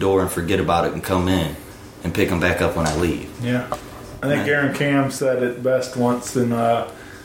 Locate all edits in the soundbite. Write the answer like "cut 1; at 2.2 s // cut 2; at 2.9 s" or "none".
none

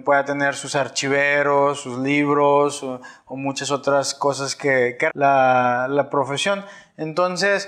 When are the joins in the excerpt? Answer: cut 1; at 5.1 s

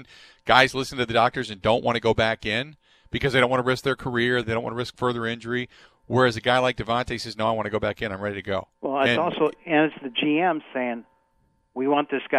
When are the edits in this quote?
cut 1; at 4.4 s

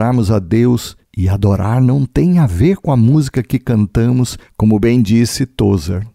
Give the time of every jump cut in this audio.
cut 1; at 4.5 s

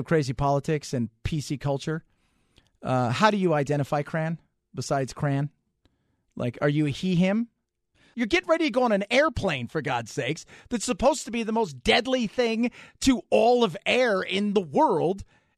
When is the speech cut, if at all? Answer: cut 1; at 8.1 s

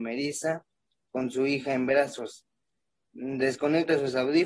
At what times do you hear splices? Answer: none

